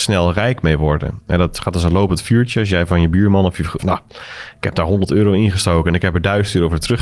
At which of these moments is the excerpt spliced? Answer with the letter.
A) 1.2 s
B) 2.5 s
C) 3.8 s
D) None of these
C